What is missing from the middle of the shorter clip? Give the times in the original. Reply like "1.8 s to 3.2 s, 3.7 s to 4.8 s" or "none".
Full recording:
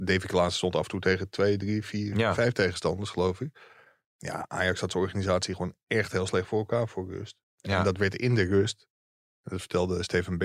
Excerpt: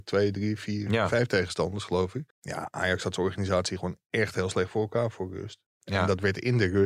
3.6 s to 4.1 s